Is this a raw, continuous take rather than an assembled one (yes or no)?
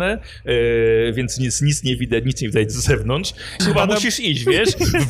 no